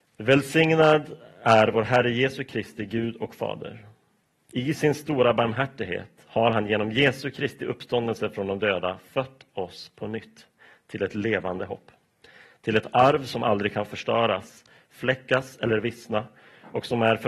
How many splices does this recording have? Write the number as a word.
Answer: zero